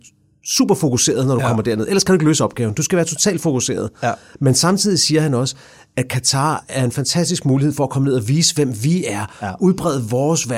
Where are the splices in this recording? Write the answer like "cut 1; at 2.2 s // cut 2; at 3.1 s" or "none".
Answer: none

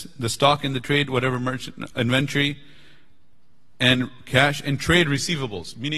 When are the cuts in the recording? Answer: none

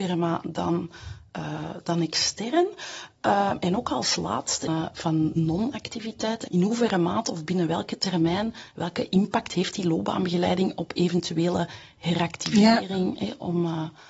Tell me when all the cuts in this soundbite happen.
cut 1; at 4.7 s // cut 2; at 6.5 s

